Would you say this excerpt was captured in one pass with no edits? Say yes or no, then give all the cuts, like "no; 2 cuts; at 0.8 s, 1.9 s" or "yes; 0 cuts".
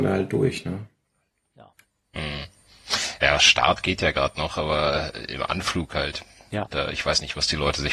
yes; 0 cuts